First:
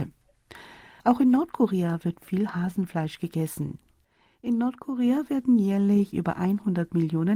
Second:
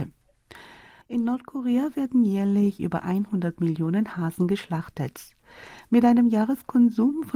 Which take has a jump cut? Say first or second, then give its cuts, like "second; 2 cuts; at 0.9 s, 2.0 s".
second; 1 cut; at 1.0 s